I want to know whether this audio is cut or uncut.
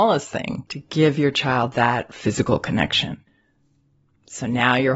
uncut